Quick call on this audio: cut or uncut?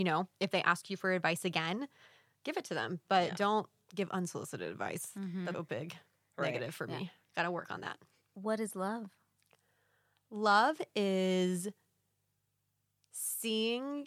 cut